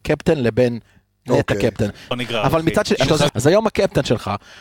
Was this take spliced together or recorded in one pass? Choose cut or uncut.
cut